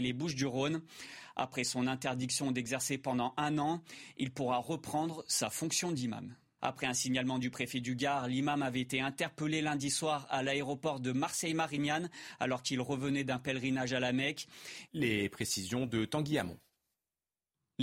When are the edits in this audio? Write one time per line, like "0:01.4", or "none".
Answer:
0:06.6
0:14.9